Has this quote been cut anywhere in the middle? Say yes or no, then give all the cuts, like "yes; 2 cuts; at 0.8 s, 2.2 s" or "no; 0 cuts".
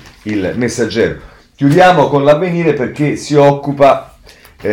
no; 0 cuts